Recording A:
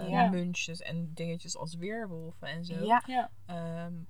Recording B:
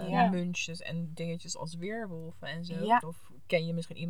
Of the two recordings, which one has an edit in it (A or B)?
B